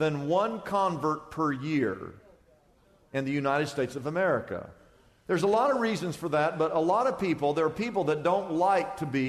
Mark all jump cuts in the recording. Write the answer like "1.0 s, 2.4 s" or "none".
none